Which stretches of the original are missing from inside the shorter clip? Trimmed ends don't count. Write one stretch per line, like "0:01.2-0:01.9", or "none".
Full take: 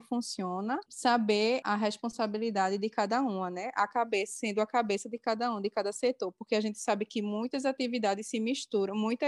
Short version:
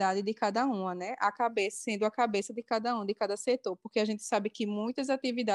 none